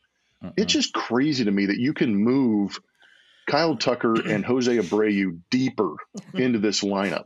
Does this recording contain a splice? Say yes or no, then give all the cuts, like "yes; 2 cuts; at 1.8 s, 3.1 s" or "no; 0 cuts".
no; 0 cuts